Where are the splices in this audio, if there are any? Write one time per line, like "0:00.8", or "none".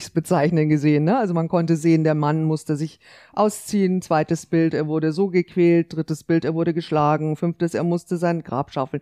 0:07.4